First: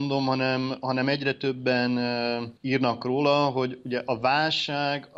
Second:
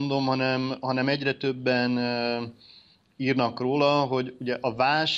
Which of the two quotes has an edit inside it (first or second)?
first